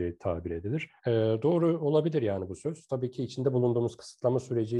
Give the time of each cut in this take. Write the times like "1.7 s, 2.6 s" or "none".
1.0 s